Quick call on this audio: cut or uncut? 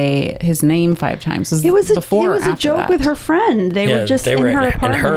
uncut